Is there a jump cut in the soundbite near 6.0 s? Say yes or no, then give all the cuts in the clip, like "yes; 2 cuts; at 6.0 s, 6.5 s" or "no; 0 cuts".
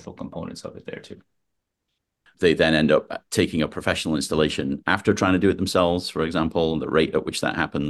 no; 1 cut; at 2.3 s